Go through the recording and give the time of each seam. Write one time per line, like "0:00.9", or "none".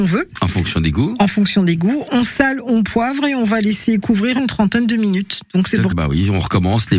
0:05.9